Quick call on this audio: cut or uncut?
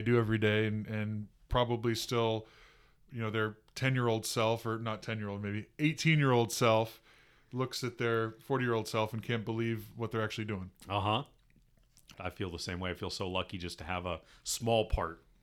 cut